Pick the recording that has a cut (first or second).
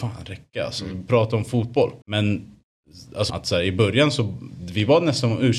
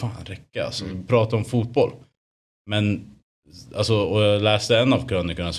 first